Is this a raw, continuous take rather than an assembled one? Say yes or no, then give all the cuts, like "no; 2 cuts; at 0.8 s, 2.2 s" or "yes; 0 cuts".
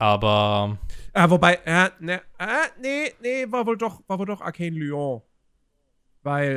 yes; 0 cuts